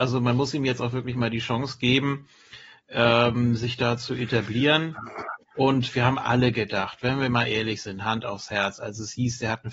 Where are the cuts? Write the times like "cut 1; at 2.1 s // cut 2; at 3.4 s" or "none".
none

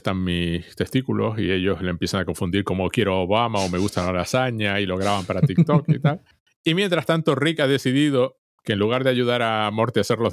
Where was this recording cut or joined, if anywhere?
none

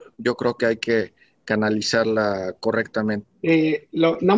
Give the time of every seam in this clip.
cut 1; at 3.2 s

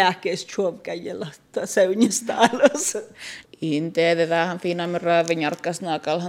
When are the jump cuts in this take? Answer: cut 1; at 3.4 s

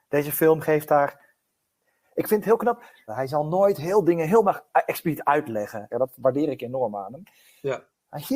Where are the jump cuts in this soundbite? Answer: cut 1; at 3.1 s // cut 2; at 5.9 s

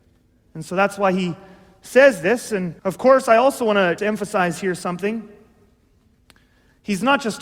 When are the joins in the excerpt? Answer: cut 1; at 2.8 s // cut 2; at 4.0 s

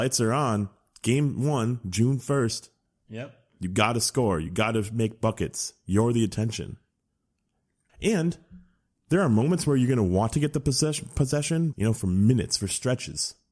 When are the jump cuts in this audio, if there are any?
cut 1; at 7.9 s // cut 2; at 11.7 s

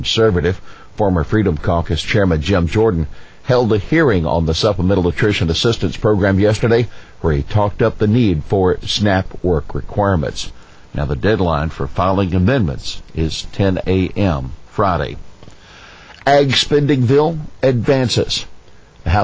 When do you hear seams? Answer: none

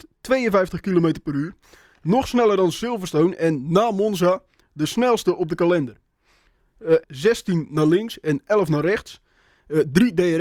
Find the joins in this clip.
cut 1; at 7.0 s

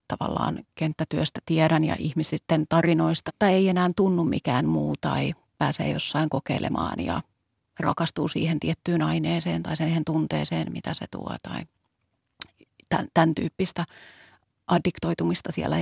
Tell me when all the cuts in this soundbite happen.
cut 1; at 3.3 s

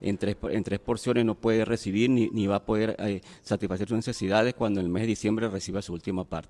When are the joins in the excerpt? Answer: none

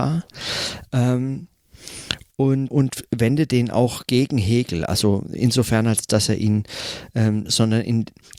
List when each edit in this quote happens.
cut 1; at 2.7 s // cut 2; at 7.5 s

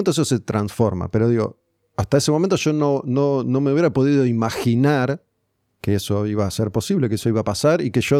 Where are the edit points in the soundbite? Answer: none

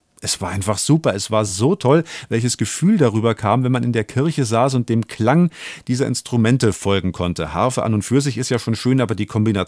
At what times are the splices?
none

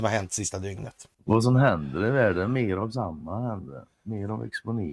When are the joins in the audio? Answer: cut 1; at 1.1 s

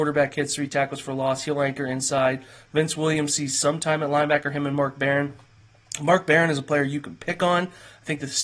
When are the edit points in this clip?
none

